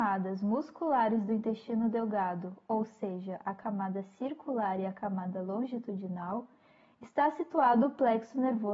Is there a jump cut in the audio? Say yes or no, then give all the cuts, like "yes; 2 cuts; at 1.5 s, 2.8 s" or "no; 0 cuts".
no; 0 cuts